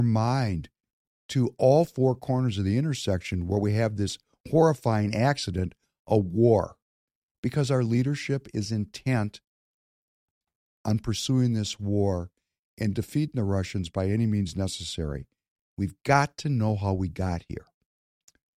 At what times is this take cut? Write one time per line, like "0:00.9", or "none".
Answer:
0:07.3
0:15.7